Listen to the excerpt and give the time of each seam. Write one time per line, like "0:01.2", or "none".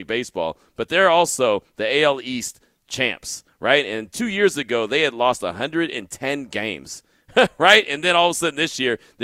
none